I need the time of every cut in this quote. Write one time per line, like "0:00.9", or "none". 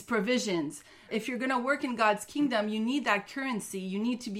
0:01.1